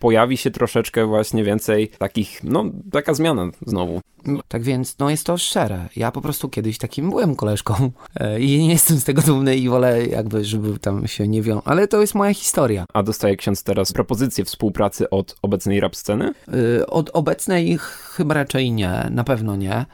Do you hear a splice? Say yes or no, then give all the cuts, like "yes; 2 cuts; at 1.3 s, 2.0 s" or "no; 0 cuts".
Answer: yes; 1 cut; at 4.4 s